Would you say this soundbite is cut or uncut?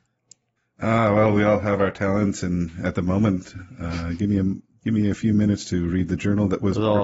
uncut